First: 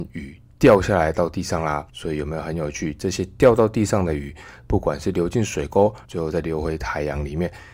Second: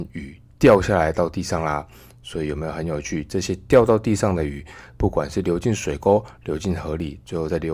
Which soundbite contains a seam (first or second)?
first